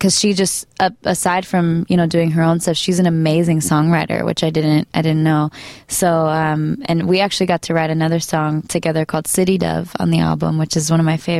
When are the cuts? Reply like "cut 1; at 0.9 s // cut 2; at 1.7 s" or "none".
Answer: none

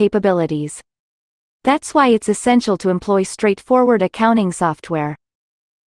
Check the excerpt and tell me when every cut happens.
none

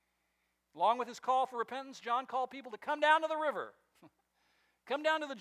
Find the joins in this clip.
none

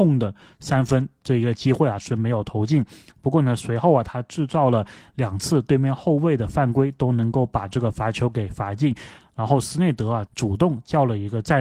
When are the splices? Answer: cut 1; at 9.2 s // cut 2; at 10.3 s

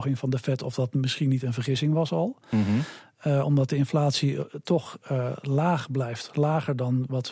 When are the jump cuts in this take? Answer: none

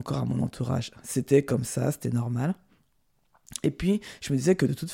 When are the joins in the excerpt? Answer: none

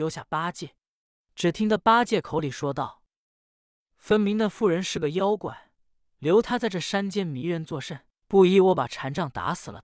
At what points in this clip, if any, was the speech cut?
cut 1; at 1.2 s // cut 2; at 8.2 s

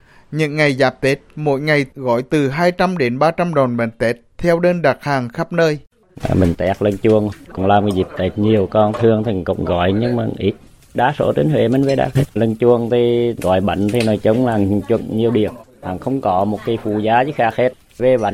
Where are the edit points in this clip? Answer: cut 1; at 12.4 s

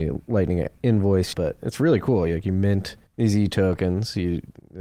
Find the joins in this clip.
cut 1; at 1.3 s // cut 2; at 3.1 s

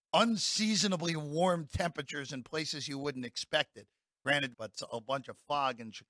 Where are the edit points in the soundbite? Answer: cut 1; at 4.5 s

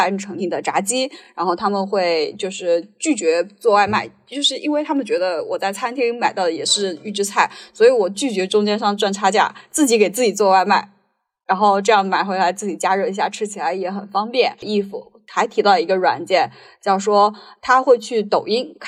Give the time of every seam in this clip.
none

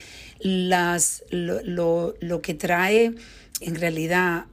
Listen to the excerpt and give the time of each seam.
cut 1; at 3.6 s

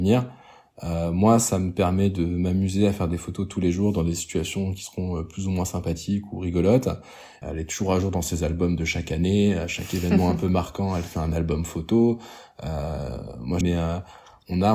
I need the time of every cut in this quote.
cut 1; at 7.4 s // cut 2; at 13.6 s

